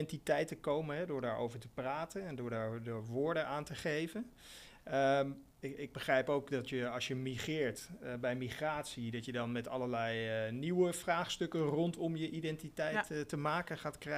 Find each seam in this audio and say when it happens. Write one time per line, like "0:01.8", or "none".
0:05.5